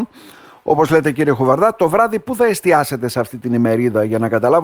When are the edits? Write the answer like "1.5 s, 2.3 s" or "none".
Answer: none